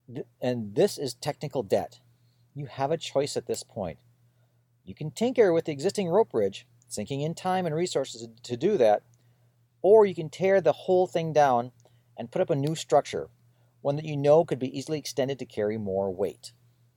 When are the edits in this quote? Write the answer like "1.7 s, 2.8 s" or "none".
none